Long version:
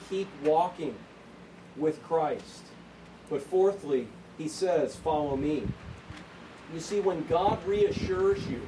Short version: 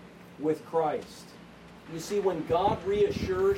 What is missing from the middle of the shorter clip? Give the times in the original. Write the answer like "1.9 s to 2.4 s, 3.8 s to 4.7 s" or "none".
3.2 s to 6.7 s